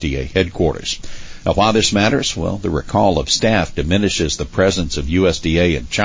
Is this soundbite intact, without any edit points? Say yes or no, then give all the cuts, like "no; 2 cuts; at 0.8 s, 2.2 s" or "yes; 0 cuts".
yes; 0 cuts